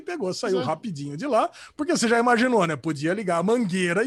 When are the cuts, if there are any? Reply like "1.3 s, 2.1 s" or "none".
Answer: none